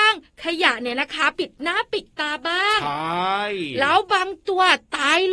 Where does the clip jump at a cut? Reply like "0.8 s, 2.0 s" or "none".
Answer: 1.3 s